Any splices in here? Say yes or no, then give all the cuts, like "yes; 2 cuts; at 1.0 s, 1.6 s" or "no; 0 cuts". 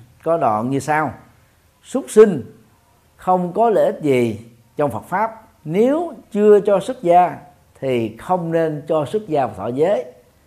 yes; 1 cut; at 5.6 s